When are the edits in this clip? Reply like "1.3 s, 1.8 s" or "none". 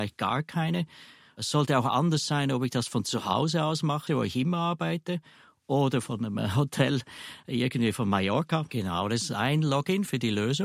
4.1 s, 8.7 s